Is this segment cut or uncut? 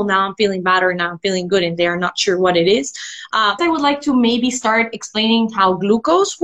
cut